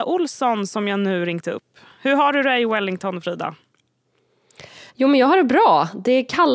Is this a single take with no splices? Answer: yes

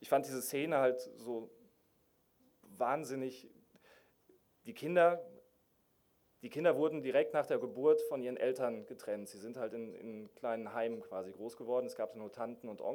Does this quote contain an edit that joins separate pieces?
no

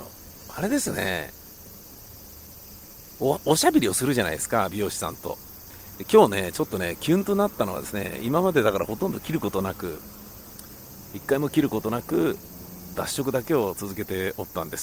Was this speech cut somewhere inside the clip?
yes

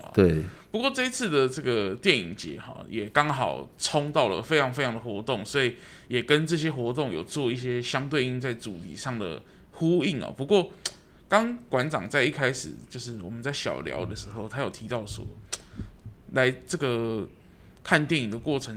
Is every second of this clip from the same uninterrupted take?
yes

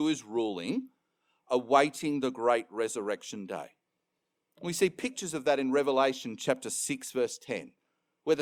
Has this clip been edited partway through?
no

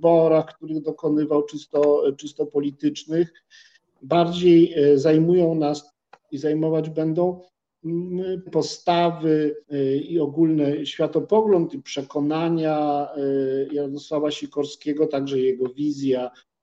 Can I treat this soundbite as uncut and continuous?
no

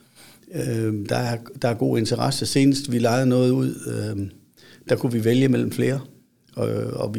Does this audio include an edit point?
no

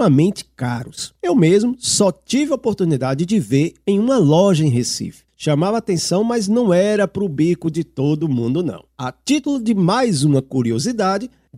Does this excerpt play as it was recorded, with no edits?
no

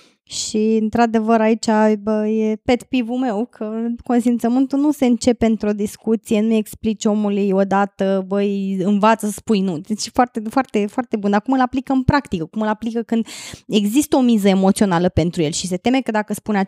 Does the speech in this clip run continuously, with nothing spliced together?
no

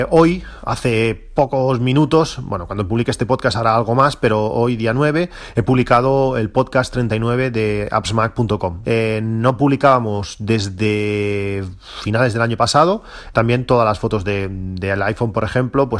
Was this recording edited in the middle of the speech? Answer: yes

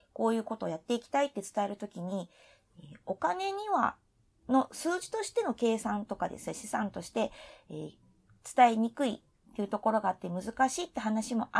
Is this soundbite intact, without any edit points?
yes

